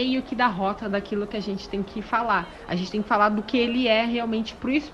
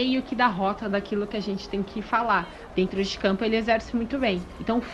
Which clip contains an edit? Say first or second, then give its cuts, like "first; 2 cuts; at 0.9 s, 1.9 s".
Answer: second; 1 cut; at 2.7 s